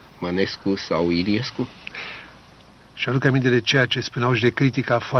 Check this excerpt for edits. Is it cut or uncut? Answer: cut